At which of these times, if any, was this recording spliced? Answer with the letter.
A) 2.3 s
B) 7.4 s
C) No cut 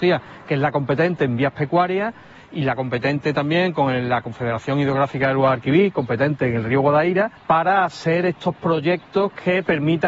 B